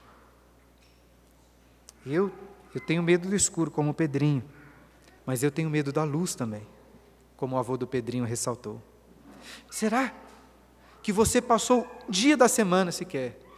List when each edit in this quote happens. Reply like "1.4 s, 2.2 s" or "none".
5.2 s, 9.7 s, 12.1 s